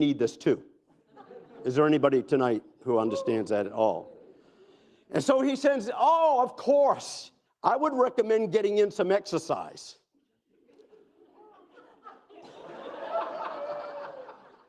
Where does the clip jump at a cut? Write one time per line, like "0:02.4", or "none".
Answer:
0:07.4
0:12.3